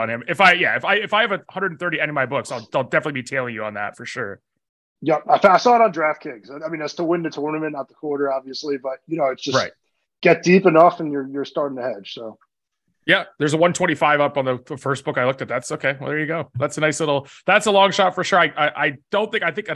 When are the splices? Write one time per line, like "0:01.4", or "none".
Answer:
none